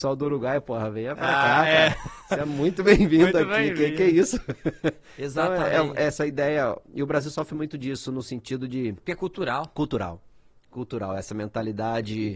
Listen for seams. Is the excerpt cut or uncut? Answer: uncut